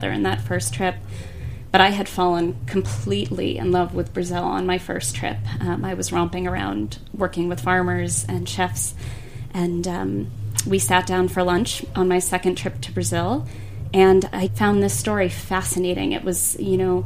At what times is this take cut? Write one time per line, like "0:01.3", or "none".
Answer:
0:14.5